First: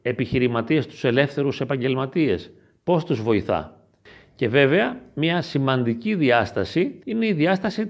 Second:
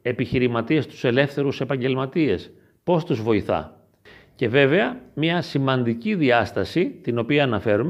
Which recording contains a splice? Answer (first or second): first